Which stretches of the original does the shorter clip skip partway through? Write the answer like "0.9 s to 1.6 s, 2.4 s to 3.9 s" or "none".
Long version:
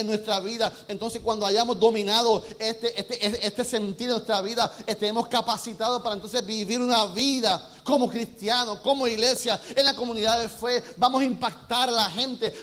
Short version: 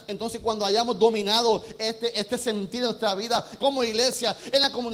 2.9 s to 3.4 s, 4.8 s to 8.8 s